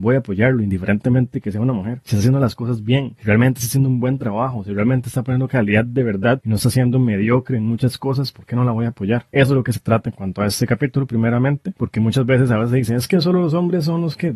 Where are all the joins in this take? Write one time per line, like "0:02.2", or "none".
none